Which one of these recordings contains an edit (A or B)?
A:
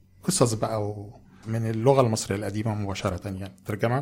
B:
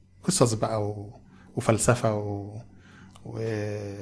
A